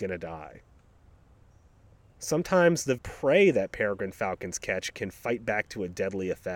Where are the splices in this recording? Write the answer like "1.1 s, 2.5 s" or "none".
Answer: 3.0 s